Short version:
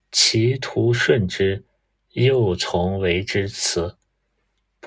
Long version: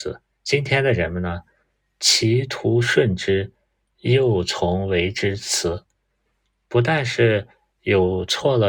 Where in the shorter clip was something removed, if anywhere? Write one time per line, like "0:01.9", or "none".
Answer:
none

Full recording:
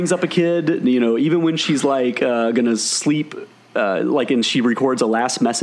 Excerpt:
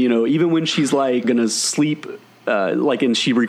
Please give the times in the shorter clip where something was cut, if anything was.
0:01.2

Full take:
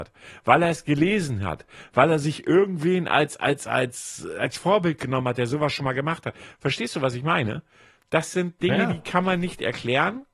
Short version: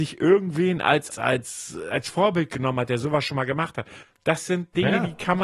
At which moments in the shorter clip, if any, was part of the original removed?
0:01.1
0:04.0

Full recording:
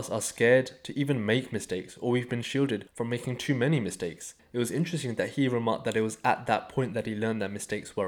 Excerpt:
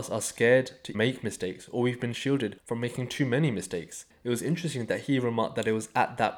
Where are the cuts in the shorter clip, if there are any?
0:00.9

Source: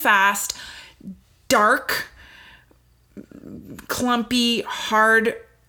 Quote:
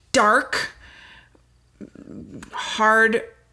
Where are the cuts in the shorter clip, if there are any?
0:02.5

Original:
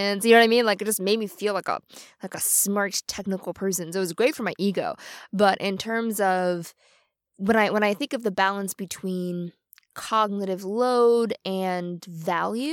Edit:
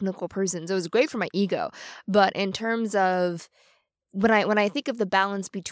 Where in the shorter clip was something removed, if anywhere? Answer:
none

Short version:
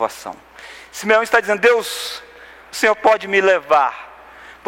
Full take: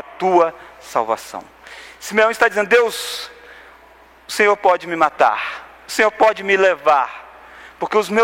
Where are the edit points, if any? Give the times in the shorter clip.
0:02.6

